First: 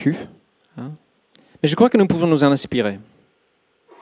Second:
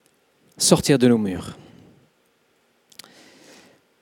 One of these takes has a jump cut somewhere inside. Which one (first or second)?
first